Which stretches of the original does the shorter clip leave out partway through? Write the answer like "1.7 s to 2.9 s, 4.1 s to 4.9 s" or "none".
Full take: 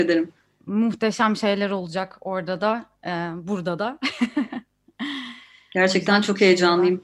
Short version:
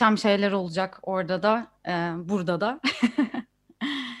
none